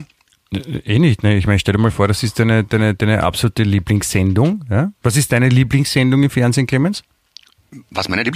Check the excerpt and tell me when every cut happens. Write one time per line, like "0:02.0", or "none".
0:05.0